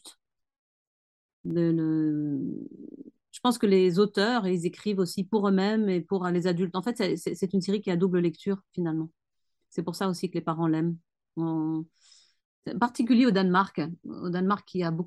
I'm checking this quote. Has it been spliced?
no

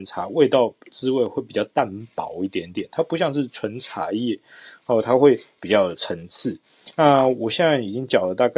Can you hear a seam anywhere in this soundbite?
yes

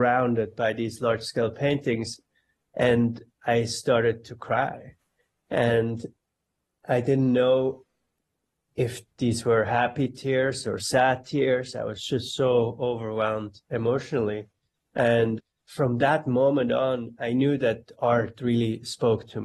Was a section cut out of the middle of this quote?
no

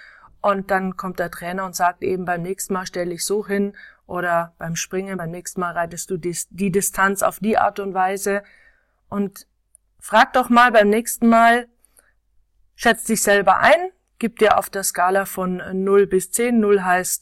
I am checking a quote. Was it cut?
no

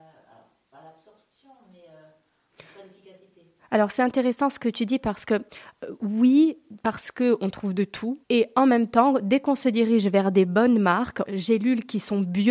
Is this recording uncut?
no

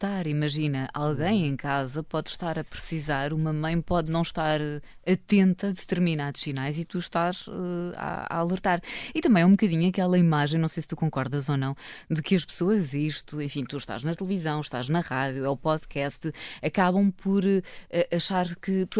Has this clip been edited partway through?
no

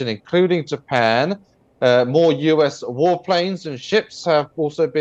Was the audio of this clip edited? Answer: no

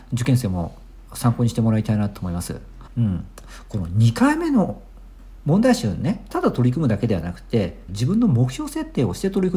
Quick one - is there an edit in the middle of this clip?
yes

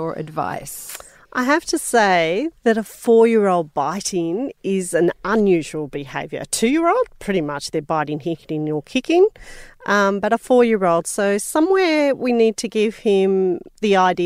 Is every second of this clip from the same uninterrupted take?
yes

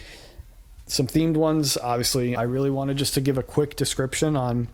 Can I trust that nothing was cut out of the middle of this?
no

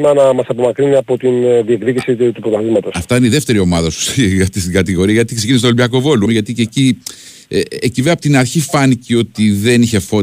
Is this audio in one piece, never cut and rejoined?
no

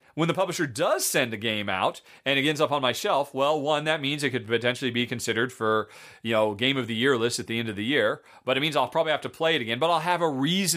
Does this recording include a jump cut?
no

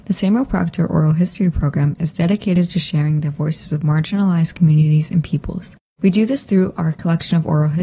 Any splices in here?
no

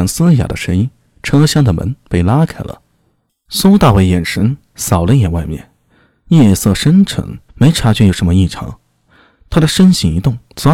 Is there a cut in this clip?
yes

